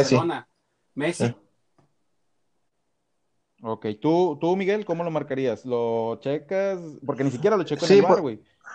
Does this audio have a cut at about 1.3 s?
yes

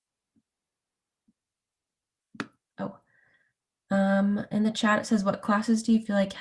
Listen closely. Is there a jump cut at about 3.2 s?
no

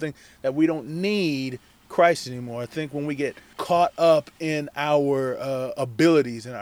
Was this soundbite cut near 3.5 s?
yes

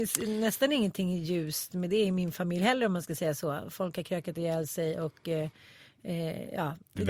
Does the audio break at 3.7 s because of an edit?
no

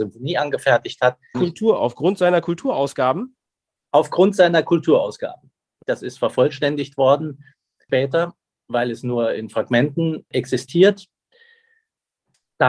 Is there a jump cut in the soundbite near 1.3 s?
yes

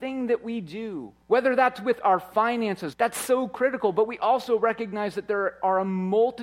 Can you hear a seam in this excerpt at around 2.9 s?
yes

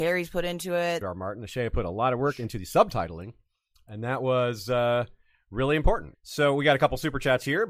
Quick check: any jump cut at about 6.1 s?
yes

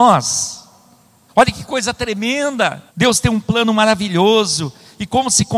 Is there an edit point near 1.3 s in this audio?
yes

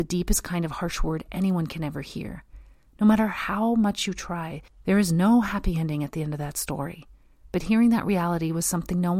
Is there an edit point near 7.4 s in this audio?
yes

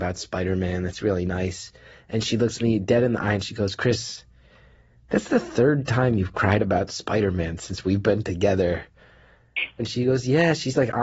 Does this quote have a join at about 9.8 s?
yes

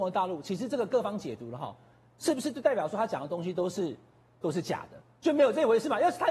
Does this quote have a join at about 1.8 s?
no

